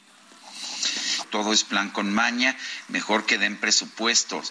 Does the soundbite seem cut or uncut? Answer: cut